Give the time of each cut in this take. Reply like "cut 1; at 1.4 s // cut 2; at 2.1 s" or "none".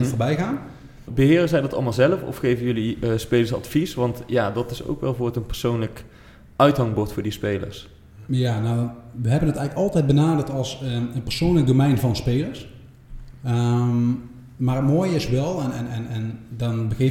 cut 1; at 1.1 s